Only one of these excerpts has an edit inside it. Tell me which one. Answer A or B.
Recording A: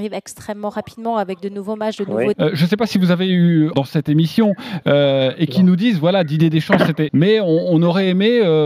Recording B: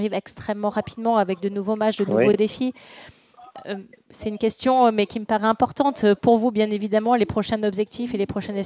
A